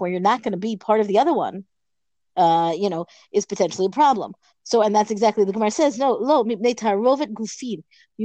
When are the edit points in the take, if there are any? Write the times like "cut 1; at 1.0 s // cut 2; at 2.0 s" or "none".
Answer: none